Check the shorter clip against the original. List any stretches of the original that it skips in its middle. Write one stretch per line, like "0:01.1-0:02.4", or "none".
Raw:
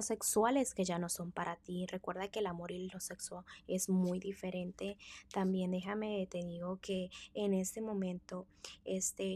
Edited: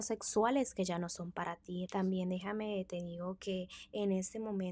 0:01.9-0:05.3